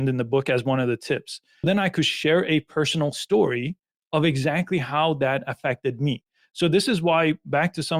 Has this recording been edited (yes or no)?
yes